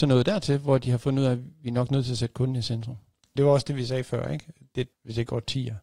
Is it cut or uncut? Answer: cut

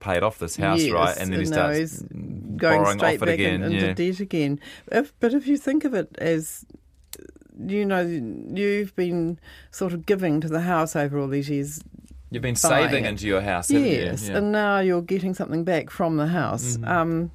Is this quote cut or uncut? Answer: uncut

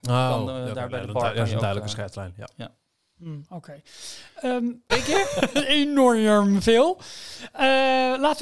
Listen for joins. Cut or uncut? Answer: cut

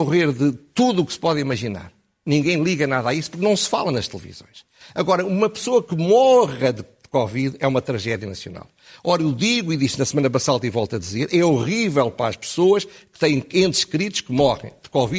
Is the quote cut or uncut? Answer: uncut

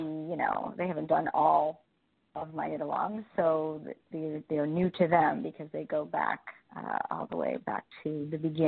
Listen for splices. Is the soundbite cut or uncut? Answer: uncut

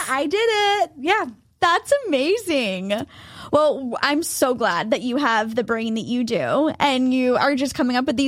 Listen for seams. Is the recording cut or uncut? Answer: uncut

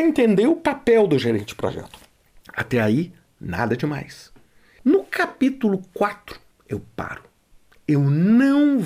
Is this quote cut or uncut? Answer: uncut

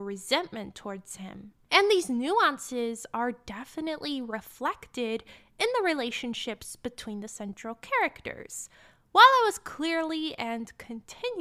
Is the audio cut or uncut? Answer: uncut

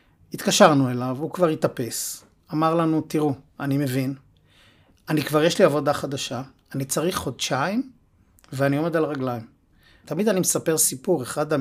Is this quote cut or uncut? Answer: cut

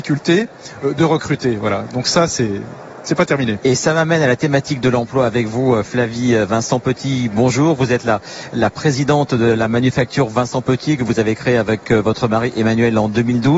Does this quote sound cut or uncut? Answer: cut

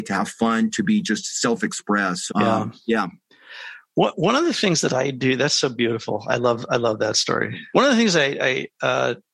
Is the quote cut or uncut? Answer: cut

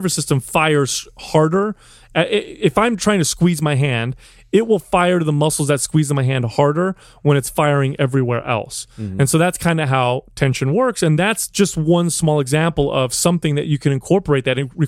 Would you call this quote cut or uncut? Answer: uncut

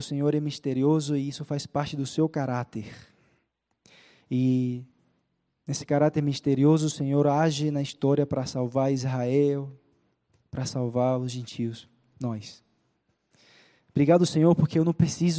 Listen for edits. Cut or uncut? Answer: uncut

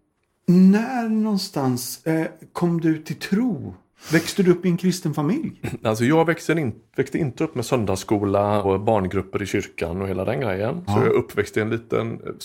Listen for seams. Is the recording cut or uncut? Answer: cut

